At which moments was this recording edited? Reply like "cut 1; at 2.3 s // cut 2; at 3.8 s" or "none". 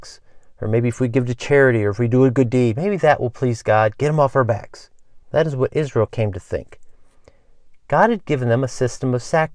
cut 1; at 5.2 s